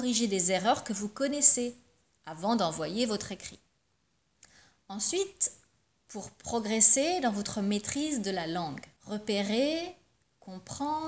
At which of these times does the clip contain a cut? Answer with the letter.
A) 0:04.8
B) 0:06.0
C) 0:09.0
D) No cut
C